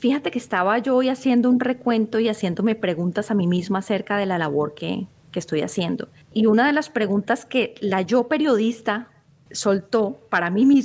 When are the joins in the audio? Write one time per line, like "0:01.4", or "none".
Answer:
none